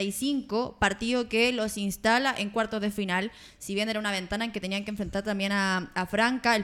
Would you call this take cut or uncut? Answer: uncut